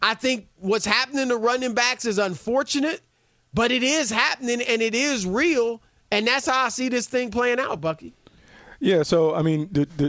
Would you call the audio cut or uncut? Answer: uncut